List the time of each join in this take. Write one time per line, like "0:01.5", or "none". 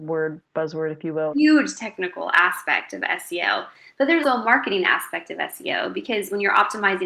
0:01.3
0:04.2